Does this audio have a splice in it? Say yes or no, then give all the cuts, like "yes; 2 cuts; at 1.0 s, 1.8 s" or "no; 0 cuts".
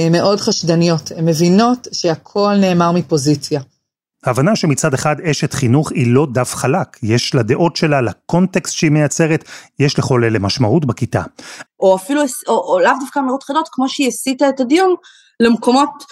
yes; 2 cuts; at 4.1 s, 11.7 s